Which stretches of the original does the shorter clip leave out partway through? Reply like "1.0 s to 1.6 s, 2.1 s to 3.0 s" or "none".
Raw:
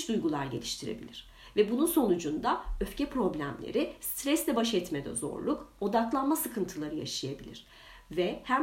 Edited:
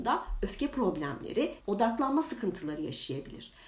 4.0 s to 5.7 s